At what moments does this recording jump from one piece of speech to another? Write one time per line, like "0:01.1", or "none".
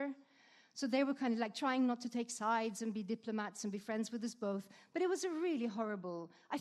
none